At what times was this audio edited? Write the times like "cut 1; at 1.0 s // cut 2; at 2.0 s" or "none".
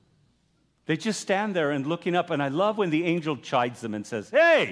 none